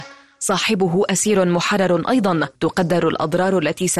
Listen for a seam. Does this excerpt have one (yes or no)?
yes